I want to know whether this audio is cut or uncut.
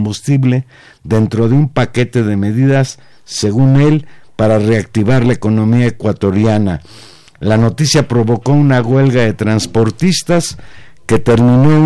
uncut